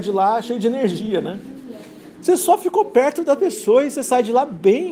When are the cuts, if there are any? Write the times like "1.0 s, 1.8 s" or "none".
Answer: 2.1 s